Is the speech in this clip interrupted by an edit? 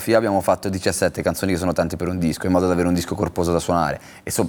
no; 0 cuts

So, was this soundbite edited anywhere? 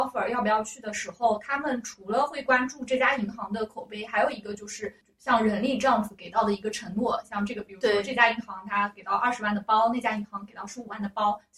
no; 0 cuts

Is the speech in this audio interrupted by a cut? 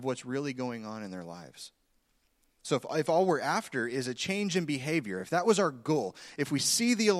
no; 0 cuts

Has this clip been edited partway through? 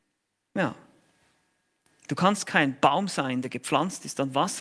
no; 0 cuts

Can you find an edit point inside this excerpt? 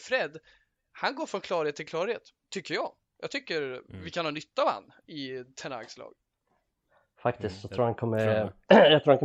no; 0 cuts

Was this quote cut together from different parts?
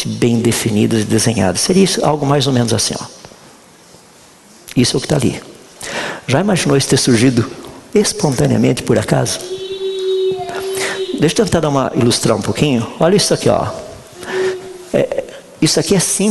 no; 0 cuts

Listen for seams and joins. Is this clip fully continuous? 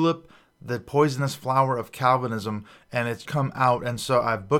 no; 1 cut; at 3.2 s

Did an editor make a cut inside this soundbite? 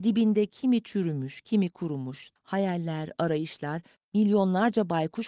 yes; 2 cuts; at 2.4 s, 4.0 s

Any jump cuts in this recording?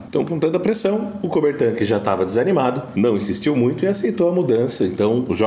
no; 0 cuts

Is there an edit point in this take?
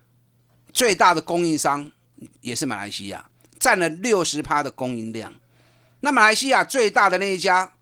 no; 0 cuts

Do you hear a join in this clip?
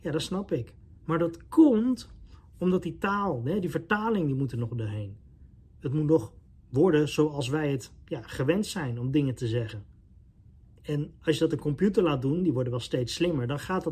no; 0 cuts

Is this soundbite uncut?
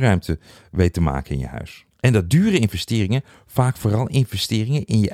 yes; 0 cuts

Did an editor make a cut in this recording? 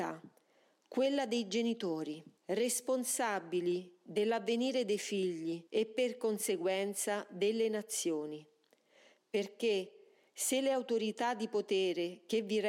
yes; 2 cuts; at 2.4 s, 5.7 s

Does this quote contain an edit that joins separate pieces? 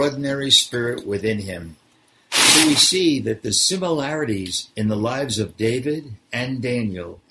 no; 0 cuts

